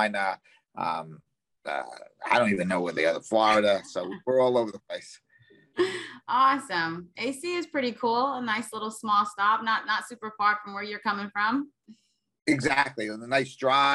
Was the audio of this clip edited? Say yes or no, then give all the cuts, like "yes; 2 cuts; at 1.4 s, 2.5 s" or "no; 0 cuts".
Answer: no; 0 cuts